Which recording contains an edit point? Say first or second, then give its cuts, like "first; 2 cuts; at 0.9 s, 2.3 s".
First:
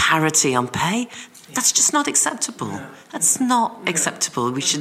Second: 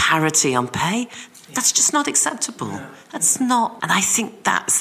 second; 1 cut; at 3.8 s